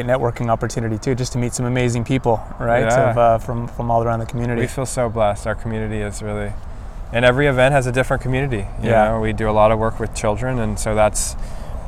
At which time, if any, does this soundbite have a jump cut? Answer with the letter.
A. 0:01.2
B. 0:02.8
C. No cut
C